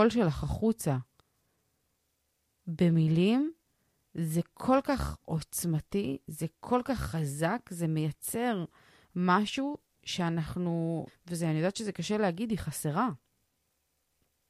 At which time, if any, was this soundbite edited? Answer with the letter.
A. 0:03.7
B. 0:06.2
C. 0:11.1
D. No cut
C